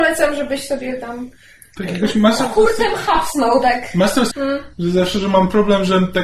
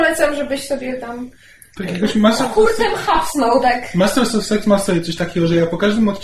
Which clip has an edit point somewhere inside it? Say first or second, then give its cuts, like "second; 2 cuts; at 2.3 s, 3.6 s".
first; 1 cut; at 4.3 s